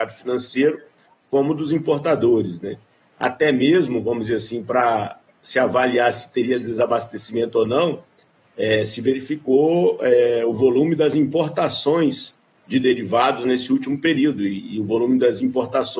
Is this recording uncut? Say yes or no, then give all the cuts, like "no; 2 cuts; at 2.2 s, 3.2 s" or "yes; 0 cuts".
no; 1 cut; at 3.1 s